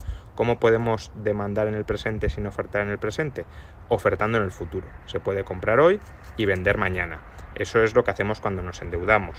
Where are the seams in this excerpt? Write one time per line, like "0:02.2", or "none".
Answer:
none